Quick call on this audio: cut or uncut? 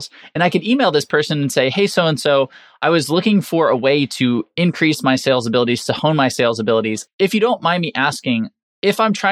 cut